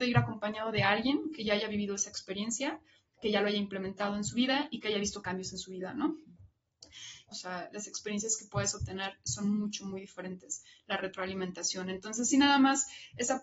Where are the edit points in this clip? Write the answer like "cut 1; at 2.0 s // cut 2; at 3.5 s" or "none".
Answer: cut 1; at 7.3 s